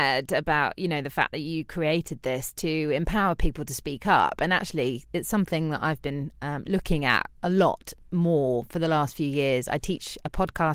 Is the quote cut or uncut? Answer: uncut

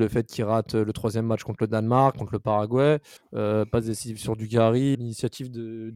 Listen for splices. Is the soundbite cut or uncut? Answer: cut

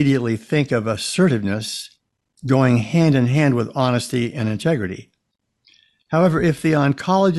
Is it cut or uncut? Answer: uncut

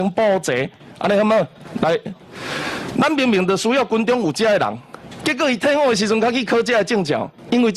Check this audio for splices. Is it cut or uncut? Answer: cut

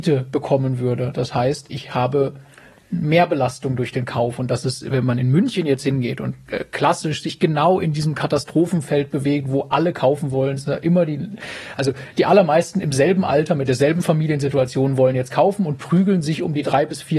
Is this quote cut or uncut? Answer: uncut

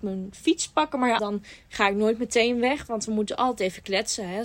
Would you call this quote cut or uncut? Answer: cut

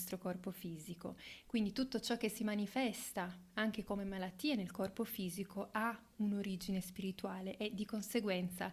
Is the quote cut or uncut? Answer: uncut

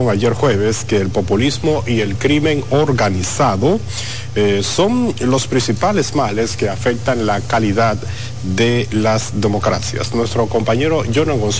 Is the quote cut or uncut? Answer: uncut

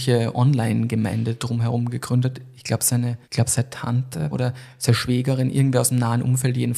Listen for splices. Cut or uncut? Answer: cut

